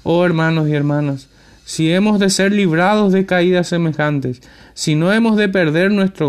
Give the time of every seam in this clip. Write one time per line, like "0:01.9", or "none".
none